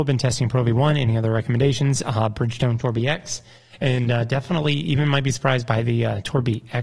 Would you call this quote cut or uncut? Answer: uncut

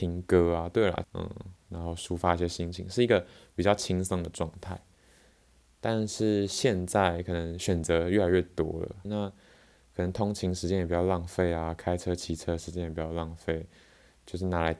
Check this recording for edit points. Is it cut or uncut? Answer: cut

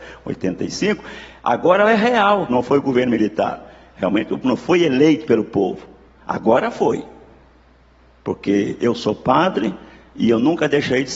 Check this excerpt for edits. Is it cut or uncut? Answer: cut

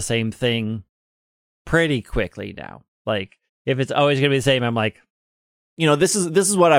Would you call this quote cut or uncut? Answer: uncut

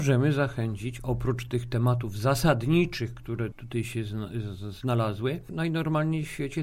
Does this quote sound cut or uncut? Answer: cut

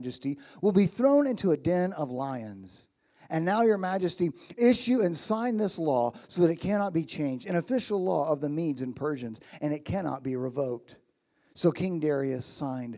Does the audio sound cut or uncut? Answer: uncut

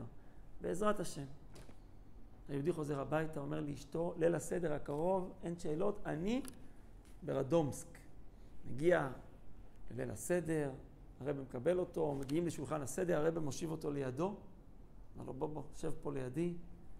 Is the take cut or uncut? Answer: uncut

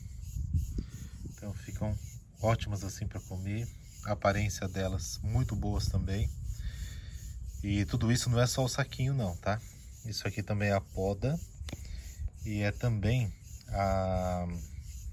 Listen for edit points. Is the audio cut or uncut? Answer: cut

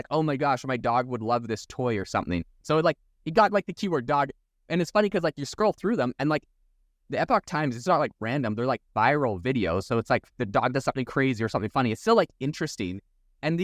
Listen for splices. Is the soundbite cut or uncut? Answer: cut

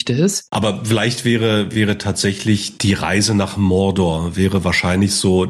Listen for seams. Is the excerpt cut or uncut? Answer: uncut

